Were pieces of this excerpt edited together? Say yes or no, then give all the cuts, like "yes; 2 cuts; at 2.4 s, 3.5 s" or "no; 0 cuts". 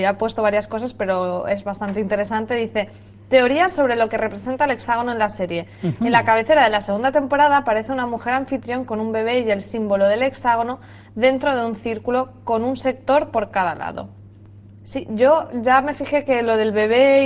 no; 0 cuts